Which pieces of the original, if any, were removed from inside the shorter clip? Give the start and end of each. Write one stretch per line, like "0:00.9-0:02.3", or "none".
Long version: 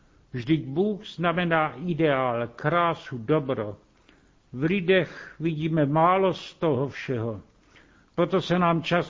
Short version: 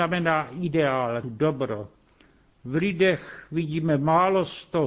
0:02.5-0:03.1